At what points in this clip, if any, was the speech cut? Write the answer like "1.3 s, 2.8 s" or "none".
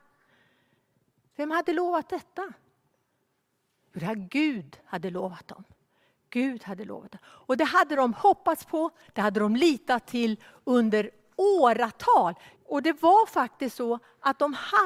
9.1 s, 12.5 s